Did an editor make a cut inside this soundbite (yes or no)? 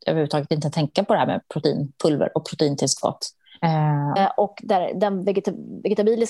yes